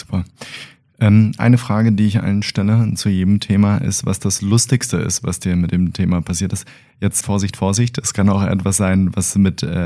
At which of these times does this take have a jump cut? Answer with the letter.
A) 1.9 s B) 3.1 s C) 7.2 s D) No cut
C